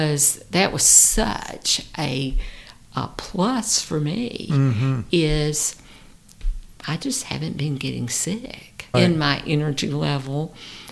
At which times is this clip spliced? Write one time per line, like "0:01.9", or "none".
0:08.9